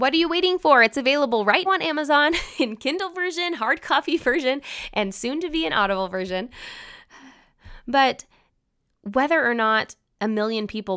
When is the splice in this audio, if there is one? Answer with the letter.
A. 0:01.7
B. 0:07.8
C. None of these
A